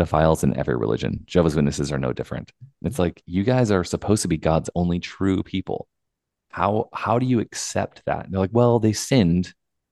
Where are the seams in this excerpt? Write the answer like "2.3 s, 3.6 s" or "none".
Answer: none